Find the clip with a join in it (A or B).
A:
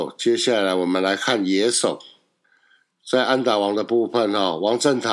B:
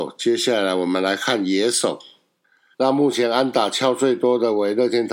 B